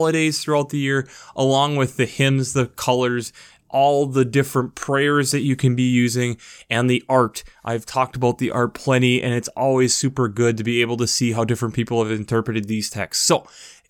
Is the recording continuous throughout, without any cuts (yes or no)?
yes